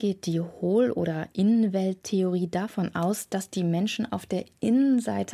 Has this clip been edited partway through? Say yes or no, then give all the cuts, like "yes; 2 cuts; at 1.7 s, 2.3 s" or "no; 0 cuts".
no; 0 cuts